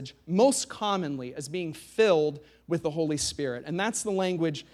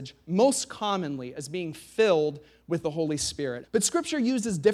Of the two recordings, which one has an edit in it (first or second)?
second